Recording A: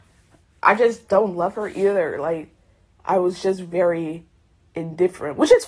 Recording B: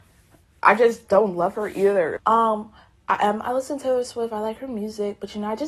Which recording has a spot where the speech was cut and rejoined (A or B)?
B